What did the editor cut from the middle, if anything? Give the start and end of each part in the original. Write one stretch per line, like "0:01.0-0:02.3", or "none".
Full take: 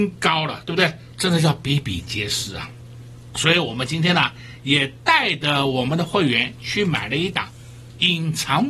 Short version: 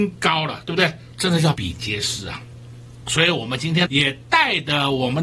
0:01.5-0:01.8
0:04.1-0:04.6